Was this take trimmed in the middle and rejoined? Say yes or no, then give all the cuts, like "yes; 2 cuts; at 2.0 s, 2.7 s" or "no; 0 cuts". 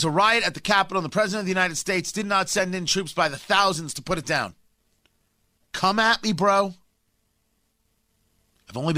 yes; 1 cut; at 5.6 s